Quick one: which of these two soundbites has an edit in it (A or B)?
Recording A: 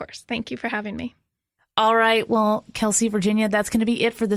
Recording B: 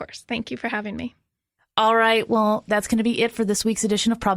B